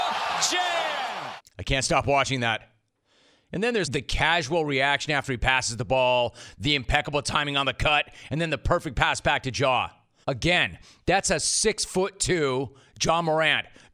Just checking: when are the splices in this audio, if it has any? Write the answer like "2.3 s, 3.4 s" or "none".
3.8 s, 10.2 s